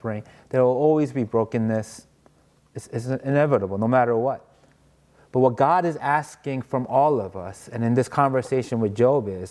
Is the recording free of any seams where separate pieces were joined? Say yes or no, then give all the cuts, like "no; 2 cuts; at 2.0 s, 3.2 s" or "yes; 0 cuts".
yes; 0 cuts